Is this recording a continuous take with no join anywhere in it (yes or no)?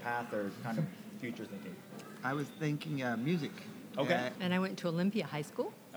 no